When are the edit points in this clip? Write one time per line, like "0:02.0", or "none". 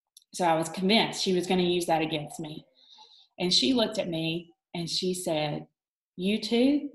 none